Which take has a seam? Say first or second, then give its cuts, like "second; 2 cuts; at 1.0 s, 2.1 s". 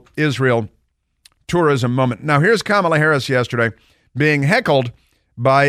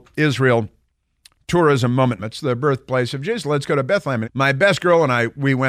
second; 2 cuts; at 2.2 s, 4.2 s